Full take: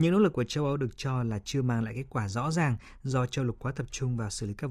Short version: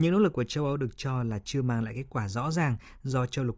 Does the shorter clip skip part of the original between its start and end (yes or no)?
no